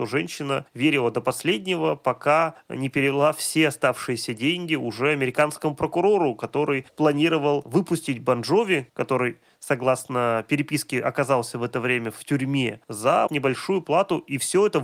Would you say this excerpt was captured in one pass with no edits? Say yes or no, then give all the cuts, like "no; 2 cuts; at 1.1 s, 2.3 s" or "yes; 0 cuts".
no; 1 cut; at 13.3 s